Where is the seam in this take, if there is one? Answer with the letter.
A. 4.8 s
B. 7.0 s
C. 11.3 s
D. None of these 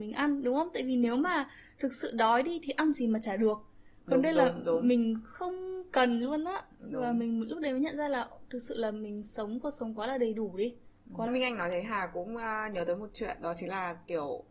C